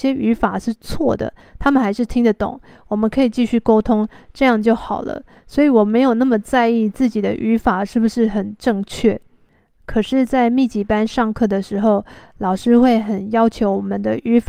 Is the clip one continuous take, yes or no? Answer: yes